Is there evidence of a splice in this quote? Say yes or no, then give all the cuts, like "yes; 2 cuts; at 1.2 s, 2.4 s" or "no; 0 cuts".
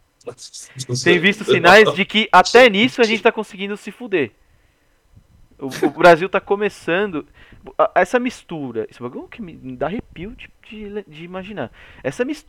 no; 0 cuts